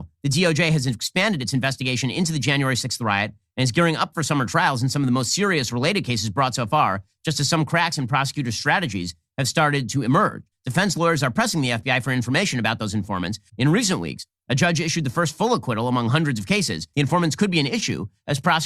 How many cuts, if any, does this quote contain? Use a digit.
3